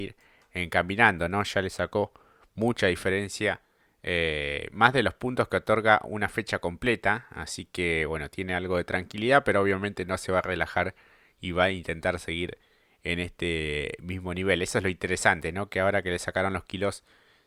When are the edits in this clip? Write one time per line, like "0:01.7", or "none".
none